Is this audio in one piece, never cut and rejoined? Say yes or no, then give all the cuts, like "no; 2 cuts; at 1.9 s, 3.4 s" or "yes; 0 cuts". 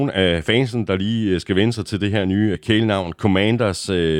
no; 1 cut; at 2.5 s